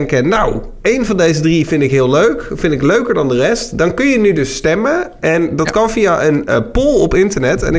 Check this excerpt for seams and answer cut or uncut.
uncut